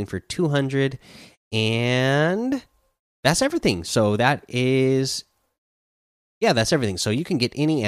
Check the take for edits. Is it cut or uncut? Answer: uncut